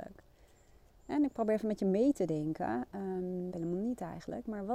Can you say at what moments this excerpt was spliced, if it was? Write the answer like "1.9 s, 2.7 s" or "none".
3.5 s